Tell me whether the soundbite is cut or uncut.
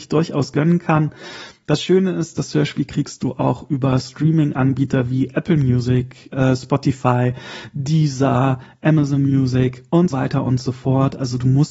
cut